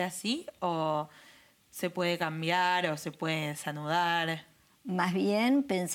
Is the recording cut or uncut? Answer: uncut